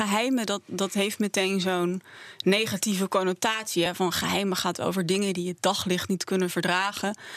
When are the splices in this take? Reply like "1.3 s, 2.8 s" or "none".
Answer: none